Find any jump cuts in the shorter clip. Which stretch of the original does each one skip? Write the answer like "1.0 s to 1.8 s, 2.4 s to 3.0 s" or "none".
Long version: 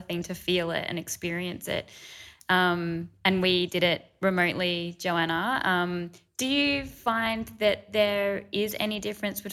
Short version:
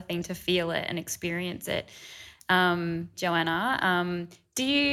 3.1 s to 5.0 s

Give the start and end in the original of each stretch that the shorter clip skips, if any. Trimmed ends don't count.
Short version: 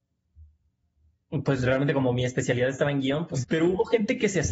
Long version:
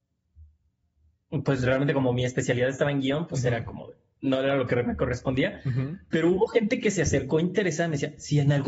3.4 s to 6.0 s

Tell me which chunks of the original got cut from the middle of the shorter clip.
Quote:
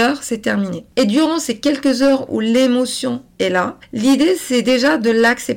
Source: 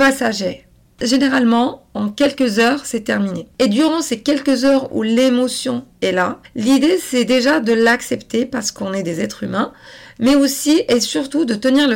none

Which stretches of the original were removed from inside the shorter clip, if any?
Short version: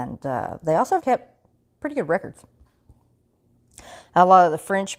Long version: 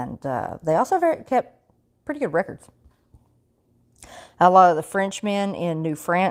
1.0 s to 1.2 s

